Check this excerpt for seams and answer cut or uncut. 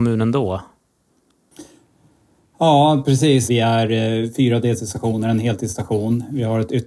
cut